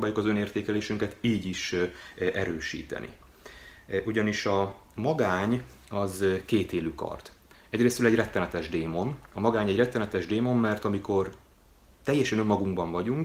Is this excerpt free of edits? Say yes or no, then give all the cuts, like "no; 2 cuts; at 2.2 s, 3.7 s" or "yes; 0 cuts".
yes; 0 cuts